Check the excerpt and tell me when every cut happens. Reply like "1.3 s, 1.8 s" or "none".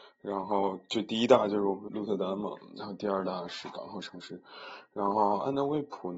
1.9 s